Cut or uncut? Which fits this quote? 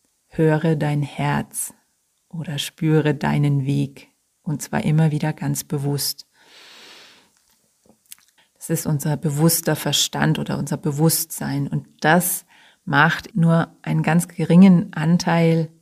cut